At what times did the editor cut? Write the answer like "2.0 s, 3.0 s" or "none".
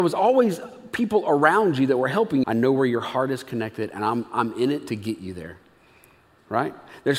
2.4 s